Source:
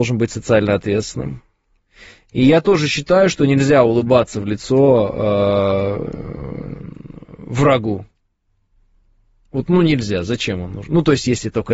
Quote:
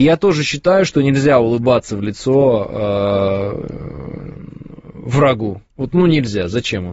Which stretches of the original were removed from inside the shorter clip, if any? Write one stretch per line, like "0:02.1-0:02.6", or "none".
0:08.1-0:09.4